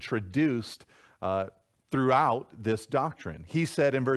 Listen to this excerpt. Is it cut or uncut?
uncut